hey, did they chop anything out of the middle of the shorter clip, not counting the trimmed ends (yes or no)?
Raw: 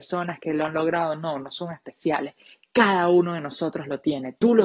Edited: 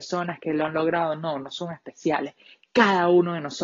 no